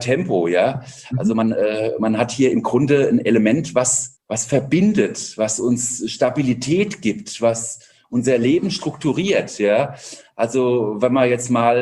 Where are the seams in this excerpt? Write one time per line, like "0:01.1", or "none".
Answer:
none